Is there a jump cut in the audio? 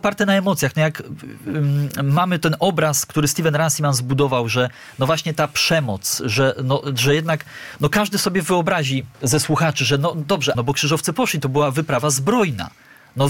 yes; 2 cuts; at 9.1 s, 10.5 s

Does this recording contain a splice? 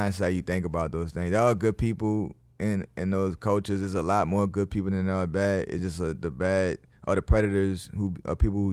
no; 0 cuts

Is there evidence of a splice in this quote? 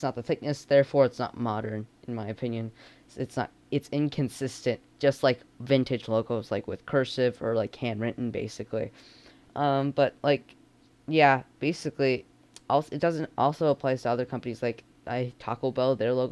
no; 0 cuts

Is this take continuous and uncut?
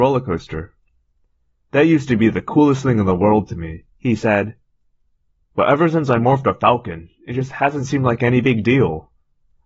yes; 0 cuts

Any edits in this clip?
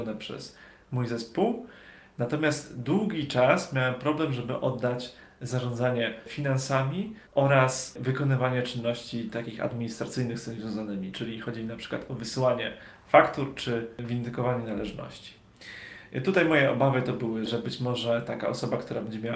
yes; 2 cuts; at 7.3 s, 17.5 s

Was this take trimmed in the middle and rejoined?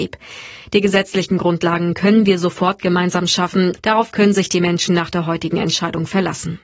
yes; 1 cut; at 3.8 s

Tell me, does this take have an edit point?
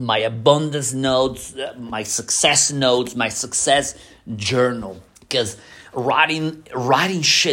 yes; 1 cut; at 5.1 s

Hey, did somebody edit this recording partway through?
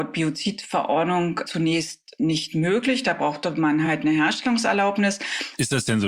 no; 0 cuts

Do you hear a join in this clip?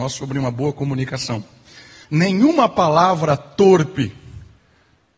yes; 1 cut; at 2.0 s

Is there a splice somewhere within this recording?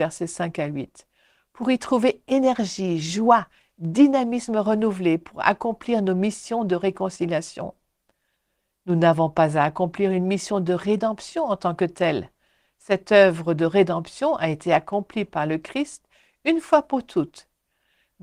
no; 0 cuts

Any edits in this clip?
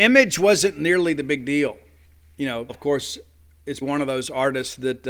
yes; 2 cuts; at 2.7 s, 3.8 s

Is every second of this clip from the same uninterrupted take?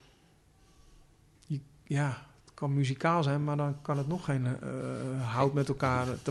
yes; 0 cuts

